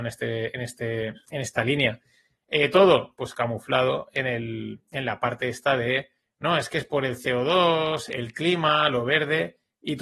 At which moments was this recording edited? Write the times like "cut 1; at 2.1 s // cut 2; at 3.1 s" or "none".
cut 1; at 2.4 s // cut 2; at 8.1 s